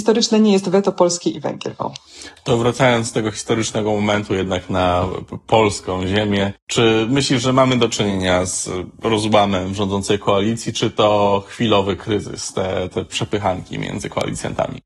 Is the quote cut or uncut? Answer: uncut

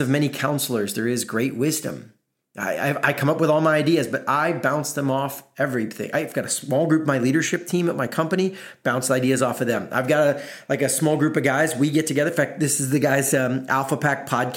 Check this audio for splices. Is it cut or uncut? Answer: uncut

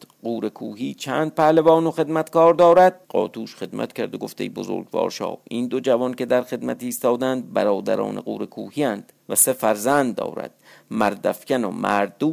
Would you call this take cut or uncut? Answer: cut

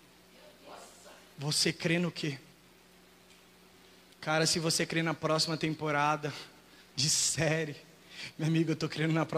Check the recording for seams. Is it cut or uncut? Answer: uncut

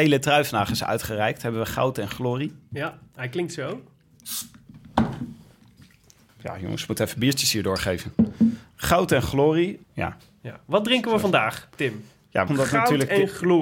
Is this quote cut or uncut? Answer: cut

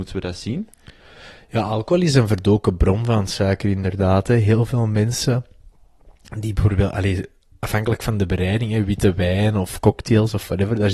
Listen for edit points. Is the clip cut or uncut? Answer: uncut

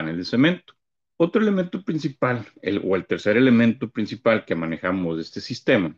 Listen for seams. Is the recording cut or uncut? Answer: cut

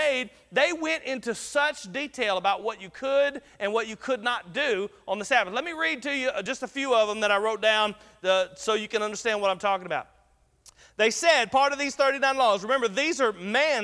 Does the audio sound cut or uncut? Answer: uncut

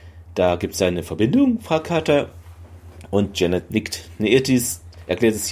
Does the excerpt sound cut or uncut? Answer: uncut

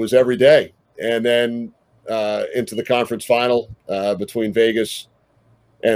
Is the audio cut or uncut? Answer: uncut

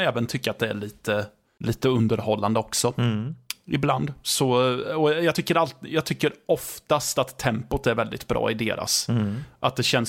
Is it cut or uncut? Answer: uncut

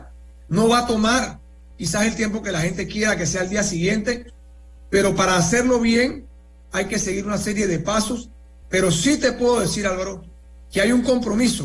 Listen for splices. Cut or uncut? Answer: cut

